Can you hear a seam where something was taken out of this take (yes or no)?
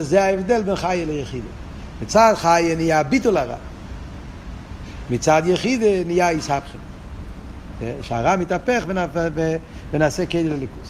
no